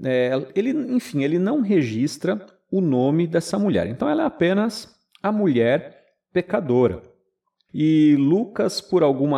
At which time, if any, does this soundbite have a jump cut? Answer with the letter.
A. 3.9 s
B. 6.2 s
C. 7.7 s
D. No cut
C